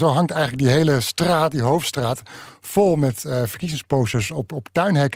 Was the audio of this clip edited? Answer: no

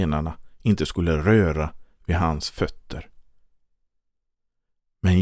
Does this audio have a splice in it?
no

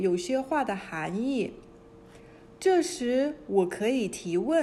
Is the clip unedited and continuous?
yes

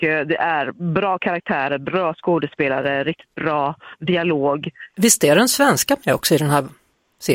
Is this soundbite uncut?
no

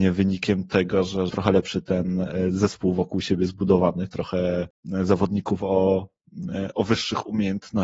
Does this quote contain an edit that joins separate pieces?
yes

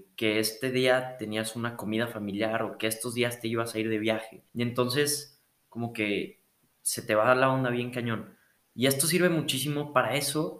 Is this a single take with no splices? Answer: no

